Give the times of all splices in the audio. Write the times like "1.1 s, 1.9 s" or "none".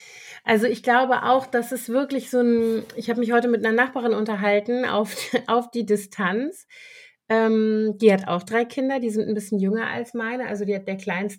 none